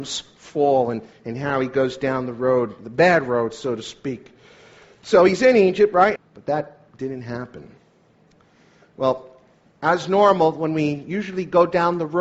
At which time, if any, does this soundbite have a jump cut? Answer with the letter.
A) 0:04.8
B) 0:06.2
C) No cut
B